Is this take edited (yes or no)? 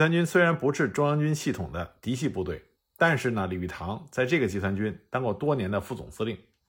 no